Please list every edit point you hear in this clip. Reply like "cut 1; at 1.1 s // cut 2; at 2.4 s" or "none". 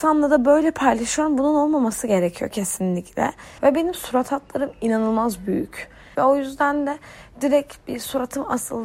cut 1; at 3.6 s // cut 2; at 6.1 s